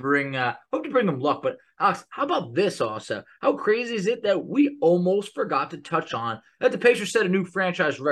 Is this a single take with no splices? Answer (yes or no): yes